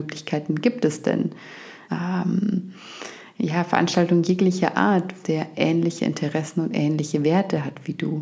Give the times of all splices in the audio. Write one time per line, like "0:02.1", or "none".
0:01.9
0:05.2